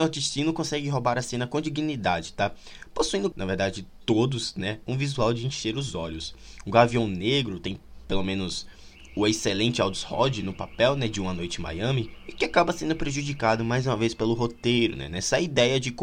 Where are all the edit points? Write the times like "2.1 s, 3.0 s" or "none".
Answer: 3.3 s